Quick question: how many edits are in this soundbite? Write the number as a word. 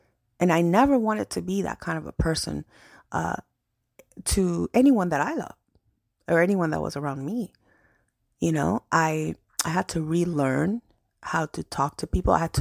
zero